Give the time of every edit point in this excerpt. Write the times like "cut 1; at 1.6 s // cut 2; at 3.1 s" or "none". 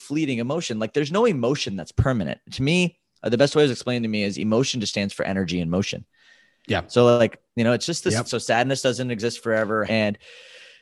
cut 1; at 8.3 s // cut 2; at 9.9 s